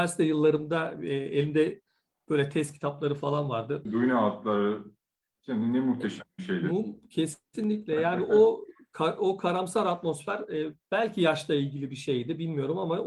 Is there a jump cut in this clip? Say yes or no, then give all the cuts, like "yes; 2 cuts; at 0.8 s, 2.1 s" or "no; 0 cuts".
yes; 1 cut; at 3.9 s